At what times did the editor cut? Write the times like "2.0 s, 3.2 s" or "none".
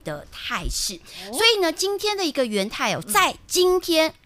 3.0 s